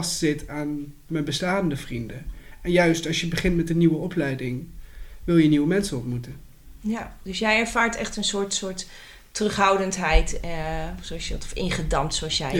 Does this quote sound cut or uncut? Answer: uncut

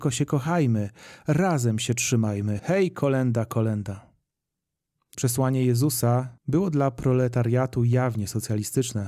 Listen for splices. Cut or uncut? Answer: cut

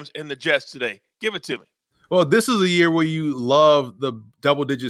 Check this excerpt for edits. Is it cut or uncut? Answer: uncut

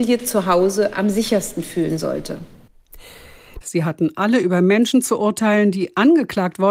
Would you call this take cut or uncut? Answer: cut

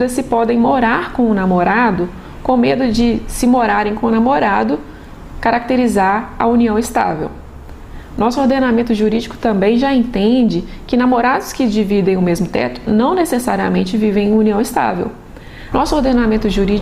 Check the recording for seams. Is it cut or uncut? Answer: cut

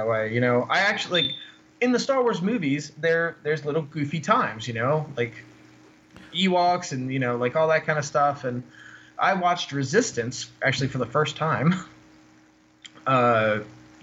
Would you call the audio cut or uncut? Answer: uncut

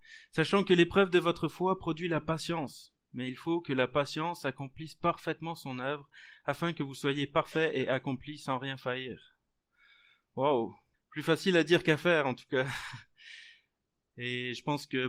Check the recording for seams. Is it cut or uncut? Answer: cut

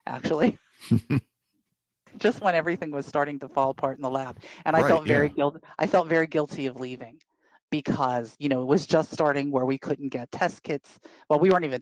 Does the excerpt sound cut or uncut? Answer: uncut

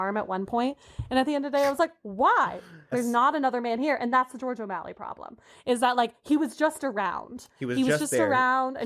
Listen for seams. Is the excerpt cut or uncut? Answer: cut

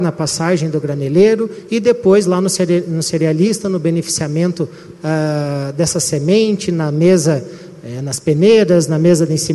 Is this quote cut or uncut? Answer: uncut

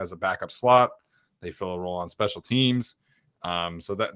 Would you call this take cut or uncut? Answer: uncut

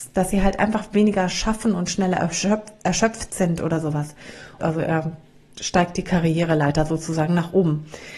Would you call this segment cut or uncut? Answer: cut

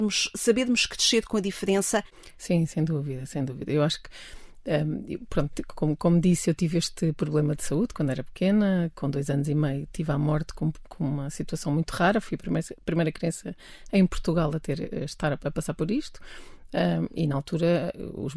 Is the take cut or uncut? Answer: uncut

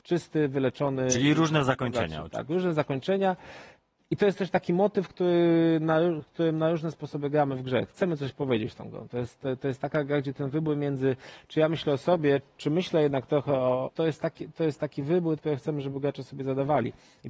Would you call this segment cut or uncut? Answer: cut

